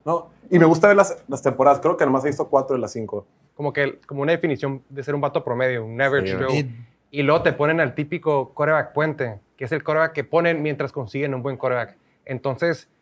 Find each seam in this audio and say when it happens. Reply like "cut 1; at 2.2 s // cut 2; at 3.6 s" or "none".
cut 1; at 3.5 s

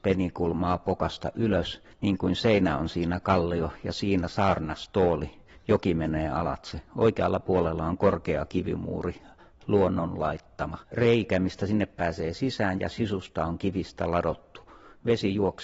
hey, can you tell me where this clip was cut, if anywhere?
cut 1; at 10.8 s

